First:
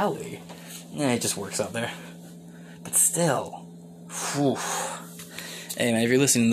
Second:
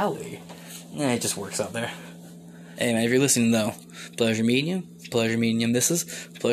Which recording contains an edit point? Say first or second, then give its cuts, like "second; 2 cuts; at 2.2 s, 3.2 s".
second; 1 cut; at 2.8 s